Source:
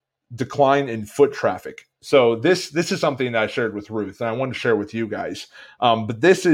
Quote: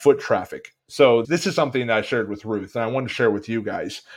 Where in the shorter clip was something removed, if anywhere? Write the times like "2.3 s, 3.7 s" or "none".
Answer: 1.2 s